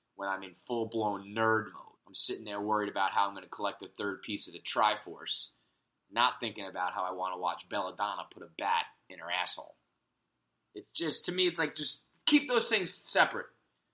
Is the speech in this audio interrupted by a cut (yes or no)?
yes